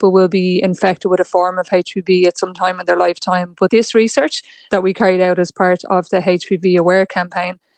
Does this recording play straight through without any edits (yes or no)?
yes